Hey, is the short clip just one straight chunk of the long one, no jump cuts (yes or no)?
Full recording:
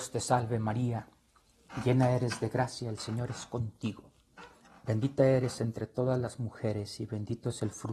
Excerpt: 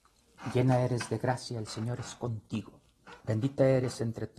no